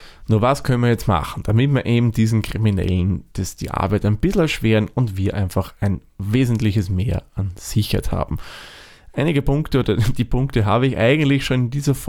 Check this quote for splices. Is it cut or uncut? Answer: uncut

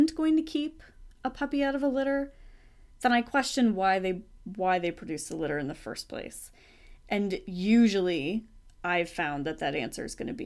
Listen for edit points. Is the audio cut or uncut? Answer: uncut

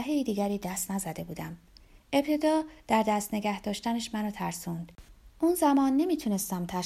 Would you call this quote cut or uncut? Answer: cut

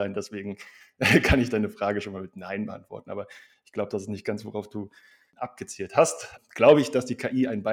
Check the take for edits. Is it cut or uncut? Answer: uncut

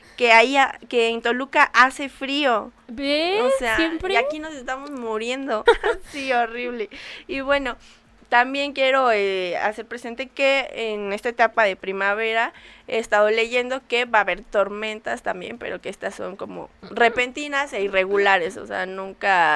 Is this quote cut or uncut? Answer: cut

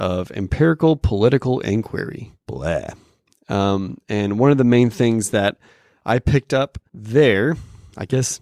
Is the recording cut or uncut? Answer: cut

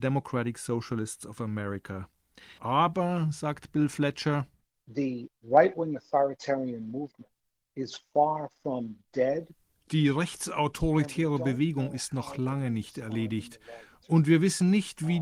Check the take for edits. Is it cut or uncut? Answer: cut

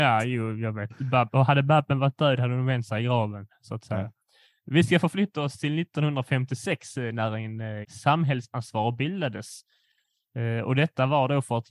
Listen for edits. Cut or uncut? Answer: cut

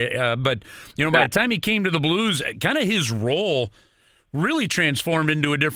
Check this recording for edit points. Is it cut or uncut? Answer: uncut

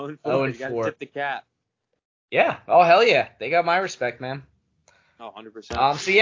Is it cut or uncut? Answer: uncut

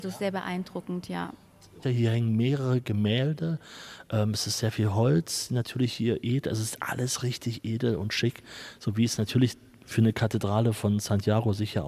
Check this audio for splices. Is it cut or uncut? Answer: cut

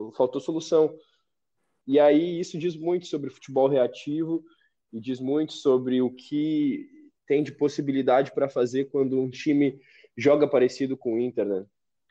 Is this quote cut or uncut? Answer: cut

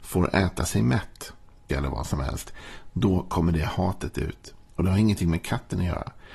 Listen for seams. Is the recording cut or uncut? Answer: cut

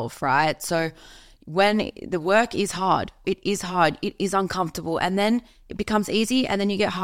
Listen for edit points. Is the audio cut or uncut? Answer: cut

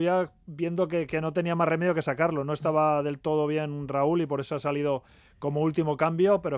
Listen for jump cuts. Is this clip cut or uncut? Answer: uncut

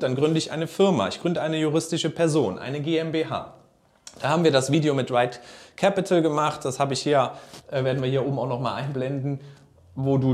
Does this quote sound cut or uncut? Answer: uncut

